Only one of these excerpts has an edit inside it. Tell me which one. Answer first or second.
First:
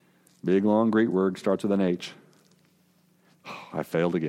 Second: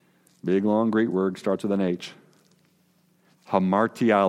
second